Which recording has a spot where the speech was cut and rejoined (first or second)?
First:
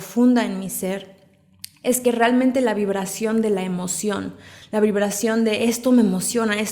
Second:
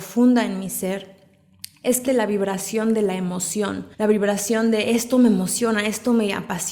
second